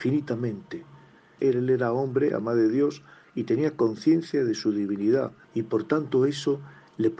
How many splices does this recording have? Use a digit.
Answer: 2